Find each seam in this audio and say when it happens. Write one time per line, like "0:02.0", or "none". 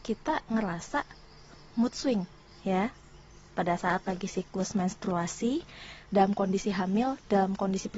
0:02.5
0:06.1

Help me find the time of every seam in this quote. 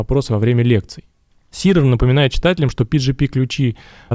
0:01.3

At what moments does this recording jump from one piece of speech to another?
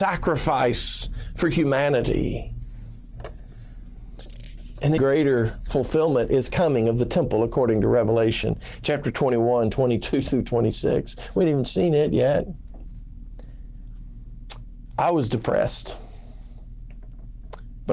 0:05.0

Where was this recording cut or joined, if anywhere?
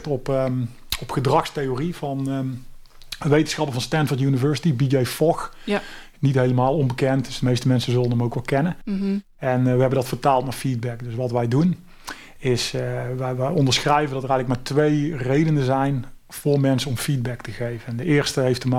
none

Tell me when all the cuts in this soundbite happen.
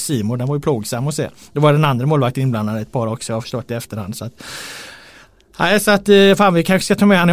none

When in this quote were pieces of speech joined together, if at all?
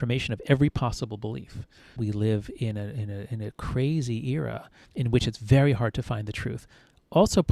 0:02.0
0:04.8

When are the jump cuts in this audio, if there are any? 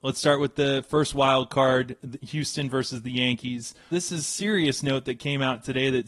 0:03.9

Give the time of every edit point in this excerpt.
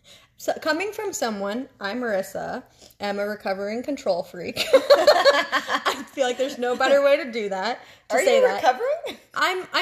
none

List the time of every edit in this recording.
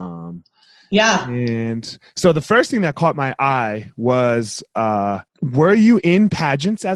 0:05.3

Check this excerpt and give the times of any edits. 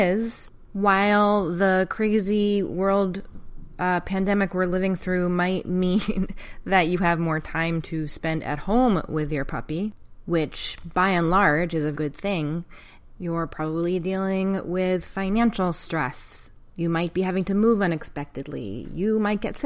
0:11.9
0:13.2

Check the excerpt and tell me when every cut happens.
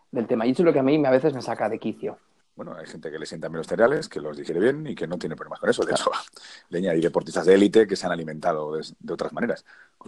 0:02.4

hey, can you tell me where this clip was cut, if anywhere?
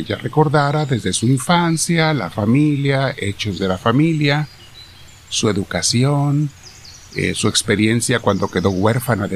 none

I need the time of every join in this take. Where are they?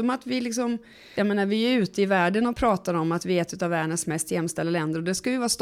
0:01.1

